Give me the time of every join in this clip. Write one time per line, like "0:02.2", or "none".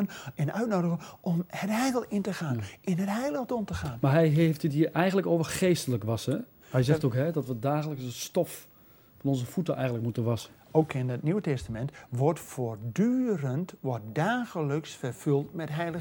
0:06.6